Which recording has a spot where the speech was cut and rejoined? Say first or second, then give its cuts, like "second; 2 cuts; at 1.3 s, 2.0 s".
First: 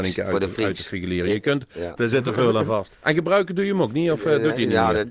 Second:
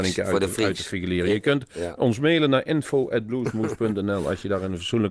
first; 1 cut; at 2.0 s